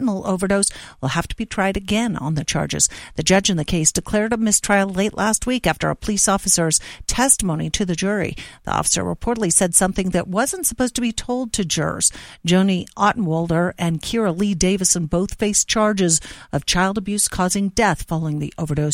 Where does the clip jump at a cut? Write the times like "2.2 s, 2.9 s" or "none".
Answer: none